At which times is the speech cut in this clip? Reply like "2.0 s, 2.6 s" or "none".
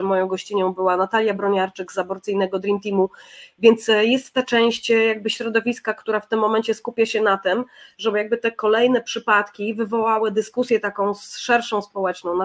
none